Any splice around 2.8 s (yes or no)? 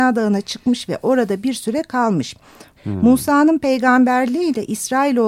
yes